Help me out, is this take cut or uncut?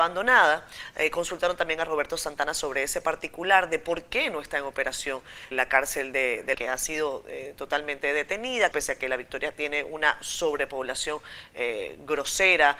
cut